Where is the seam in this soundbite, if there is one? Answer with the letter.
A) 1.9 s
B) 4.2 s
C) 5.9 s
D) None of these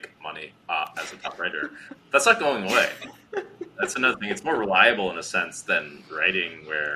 A